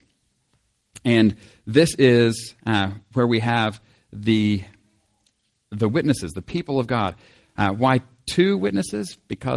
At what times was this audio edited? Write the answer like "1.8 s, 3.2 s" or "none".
none